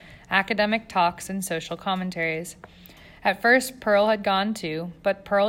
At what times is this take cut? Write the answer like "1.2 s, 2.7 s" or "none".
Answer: none